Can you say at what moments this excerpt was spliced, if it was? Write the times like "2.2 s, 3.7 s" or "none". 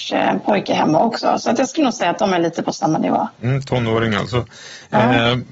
none